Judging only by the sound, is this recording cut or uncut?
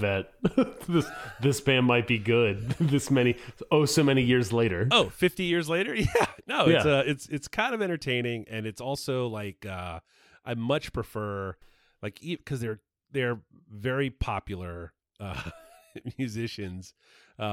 uncut